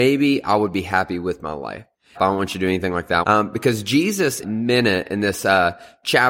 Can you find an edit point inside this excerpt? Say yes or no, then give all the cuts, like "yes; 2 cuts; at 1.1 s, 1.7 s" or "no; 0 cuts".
yes; 3 cuts; at 2.1 s, 3.2 s, 4.4 s